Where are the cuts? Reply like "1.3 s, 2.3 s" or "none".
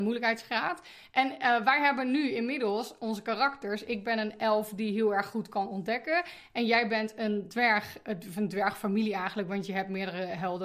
none